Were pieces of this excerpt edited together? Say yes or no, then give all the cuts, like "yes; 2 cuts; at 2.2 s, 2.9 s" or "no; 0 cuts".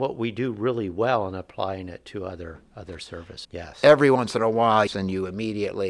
yes; 2 cuts; at 3.4 s, 4.9 s